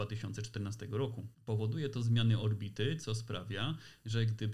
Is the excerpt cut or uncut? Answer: cut